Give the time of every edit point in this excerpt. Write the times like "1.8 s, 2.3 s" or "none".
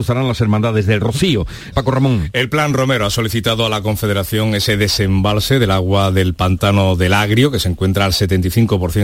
1.7 s